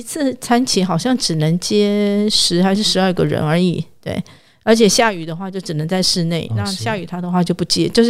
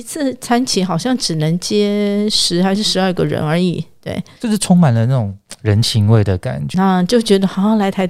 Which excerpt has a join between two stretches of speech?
second; 2 cuts; at 4.4 s, 6.7 s

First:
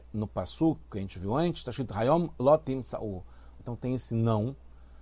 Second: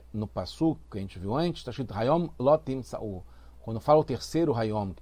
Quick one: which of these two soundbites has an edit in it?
first; 1 cut; at 3.6 s

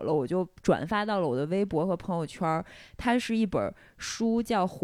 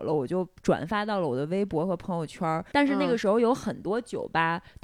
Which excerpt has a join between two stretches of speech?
second; 1 cut; at 2.7 s

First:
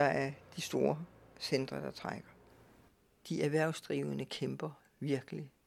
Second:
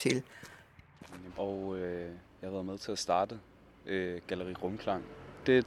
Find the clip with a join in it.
second; 1 cut; at 1.3 s

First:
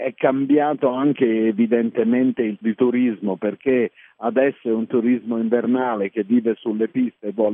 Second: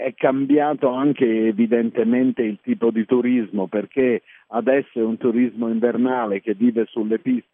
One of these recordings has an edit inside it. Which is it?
first; 1 cut; at 2.6 s

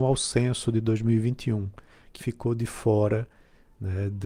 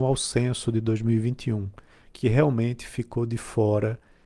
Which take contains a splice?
first; 1 cut; at 2.2 s

